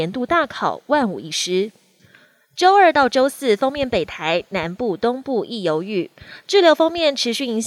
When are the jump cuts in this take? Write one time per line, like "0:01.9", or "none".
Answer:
none